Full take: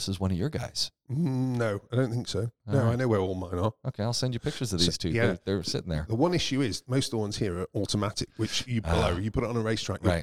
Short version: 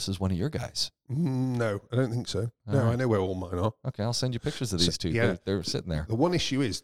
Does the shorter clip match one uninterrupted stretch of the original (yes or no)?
yes